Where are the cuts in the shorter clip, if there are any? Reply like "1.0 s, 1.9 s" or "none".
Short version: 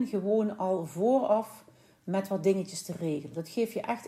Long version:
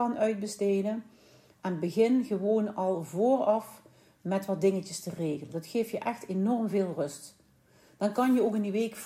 none